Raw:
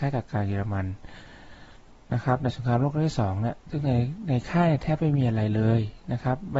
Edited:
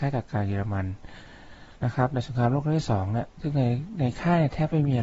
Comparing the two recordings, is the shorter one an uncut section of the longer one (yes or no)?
no